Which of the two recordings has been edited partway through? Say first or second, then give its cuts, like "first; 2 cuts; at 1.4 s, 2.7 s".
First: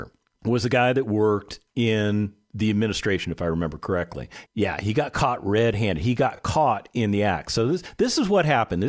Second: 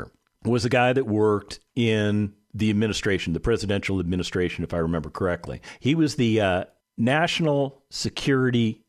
first; 2 cuts; at 3.2 s, 4.5 s